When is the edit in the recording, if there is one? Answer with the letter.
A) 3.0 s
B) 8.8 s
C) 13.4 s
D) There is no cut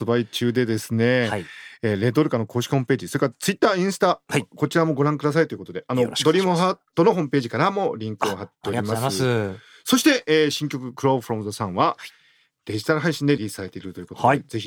C